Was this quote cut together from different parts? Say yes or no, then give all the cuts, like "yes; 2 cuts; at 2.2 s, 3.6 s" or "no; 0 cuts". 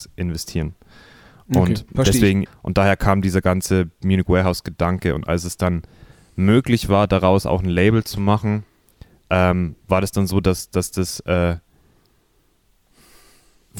yes; 1 cut; at 2.5 s